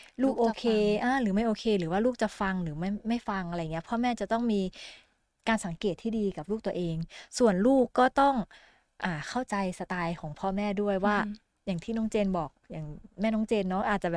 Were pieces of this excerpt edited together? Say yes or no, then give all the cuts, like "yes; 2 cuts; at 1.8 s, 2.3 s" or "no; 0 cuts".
no; 0 cuts